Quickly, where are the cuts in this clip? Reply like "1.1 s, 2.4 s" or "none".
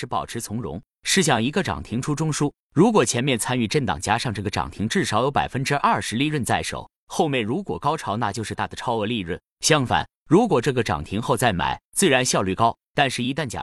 8.5 s, 11.8 s